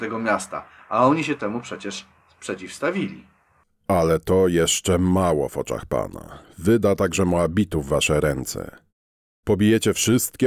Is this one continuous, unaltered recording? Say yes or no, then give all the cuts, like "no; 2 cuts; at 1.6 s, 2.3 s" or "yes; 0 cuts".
yes; 0 cuts